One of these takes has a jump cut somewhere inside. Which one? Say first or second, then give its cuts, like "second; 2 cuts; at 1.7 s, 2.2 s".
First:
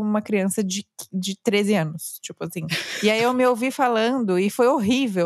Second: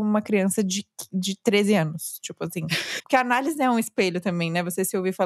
second; 1 cut; at 3.0 s